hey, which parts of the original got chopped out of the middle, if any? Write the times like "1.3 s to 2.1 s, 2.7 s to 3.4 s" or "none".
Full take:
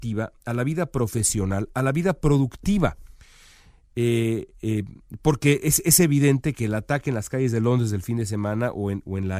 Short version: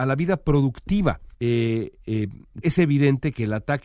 3.1 s to 3.9 s, 5.2 s to 5.8 s